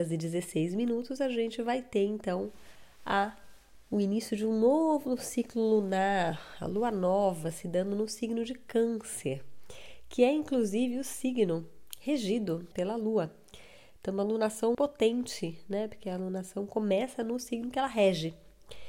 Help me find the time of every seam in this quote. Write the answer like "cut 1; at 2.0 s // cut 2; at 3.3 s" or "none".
cut 1; at 12.7 s // cut 2; at 14.7 s